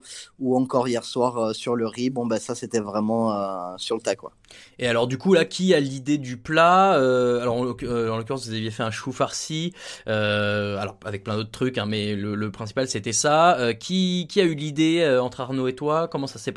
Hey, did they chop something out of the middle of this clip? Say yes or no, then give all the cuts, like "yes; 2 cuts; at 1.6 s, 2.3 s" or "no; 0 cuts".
no; 0 cuts